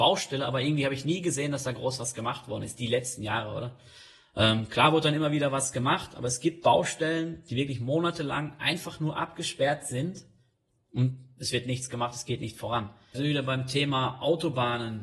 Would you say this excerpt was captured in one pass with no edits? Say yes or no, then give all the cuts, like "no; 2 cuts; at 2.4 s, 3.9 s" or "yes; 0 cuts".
no; 1 cut; at 13.1 s